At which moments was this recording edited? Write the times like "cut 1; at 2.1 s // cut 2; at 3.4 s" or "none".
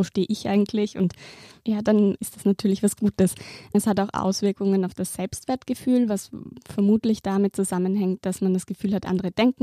none